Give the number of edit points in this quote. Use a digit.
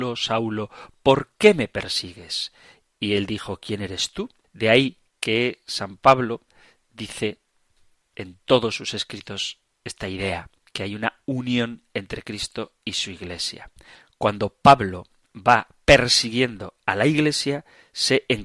1